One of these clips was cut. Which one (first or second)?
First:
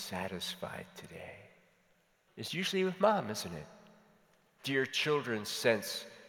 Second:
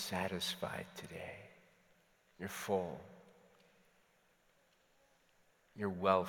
first